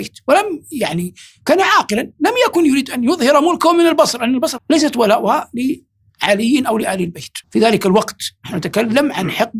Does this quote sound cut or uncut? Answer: cut